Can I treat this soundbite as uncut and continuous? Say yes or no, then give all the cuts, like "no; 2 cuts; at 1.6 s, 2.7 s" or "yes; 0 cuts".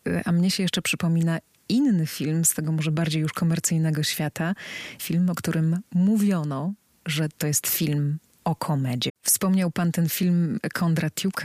no; 2 cuts; at 5.0 s, 9.1 s